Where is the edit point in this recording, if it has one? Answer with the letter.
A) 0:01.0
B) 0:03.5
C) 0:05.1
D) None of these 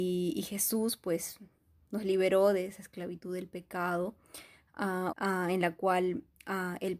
C